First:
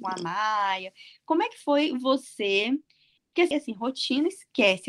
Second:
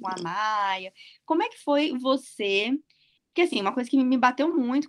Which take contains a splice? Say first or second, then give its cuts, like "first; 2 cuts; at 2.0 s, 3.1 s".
first; 1 cut; at 3.5 s